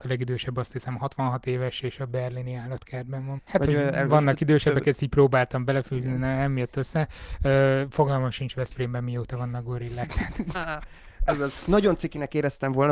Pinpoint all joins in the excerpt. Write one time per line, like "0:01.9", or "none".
0:03.4
0:10.5